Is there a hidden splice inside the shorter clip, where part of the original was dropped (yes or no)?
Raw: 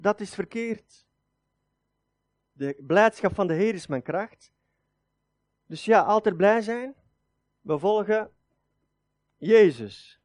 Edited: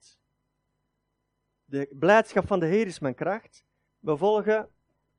yes